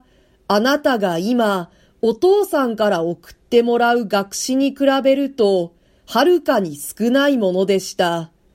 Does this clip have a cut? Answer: no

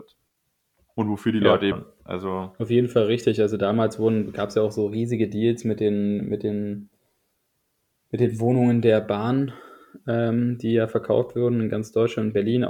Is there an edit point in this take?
yes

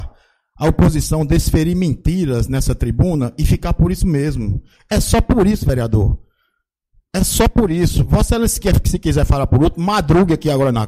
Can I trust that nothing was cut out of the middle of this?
yes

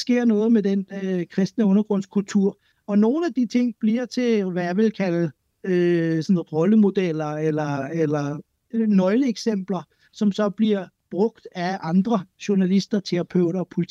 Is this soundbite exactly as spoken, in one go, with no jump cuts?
no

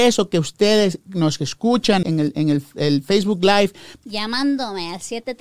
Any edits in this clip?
yes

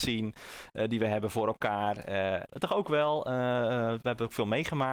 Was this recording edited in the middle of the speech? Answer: yes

